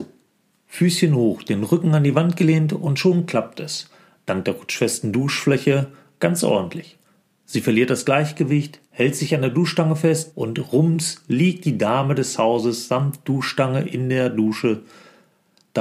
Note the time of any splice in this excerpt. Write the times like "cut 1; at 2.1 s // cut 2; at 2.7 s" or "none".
cut 1; at 7.3 s // cut 2; at 8.9 s // cut 3; at 10.3 s